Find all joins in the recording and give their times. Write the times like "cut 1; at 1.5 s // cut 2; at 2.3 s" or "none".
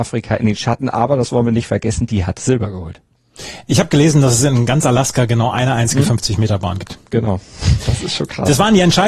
none